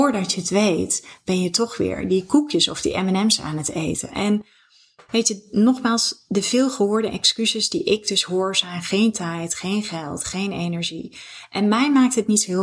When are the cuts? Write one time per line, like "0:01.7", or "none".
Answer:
none

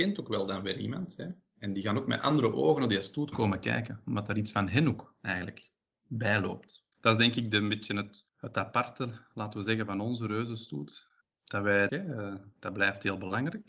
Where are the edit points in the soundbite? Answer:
0:06.9
0:08.3
0:11.9

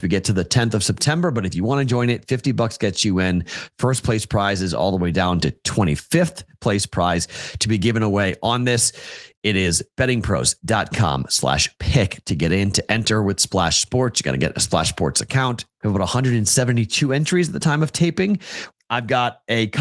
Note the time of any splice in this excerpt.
0:15.8
0:18.7

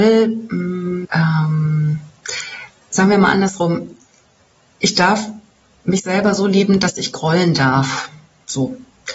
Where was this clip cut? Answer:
0:01.0

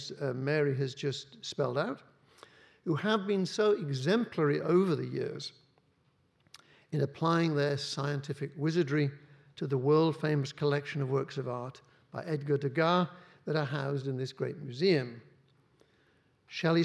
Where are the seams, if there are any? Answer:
none

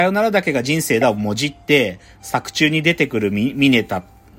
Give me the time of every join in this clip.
none

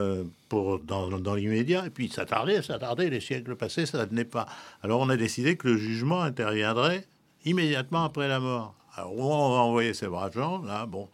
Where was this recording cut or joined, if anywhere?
none

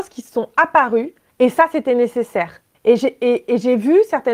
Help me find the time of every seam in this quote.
0:01.3
0:02.7

